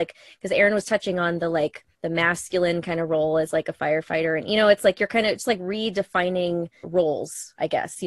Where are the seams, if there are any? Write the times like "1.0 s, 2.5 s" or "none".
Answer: 1.9 s, 6.8 s